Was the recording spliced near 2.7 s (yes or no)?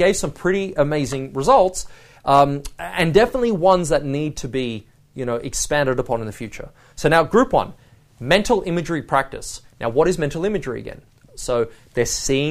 no